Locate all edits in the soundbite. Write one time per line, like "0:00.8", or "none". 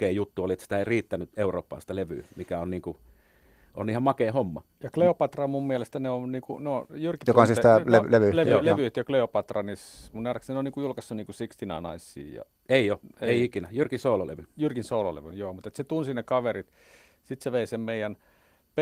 none